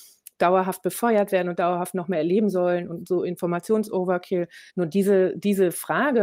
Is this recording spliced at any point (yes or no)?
yes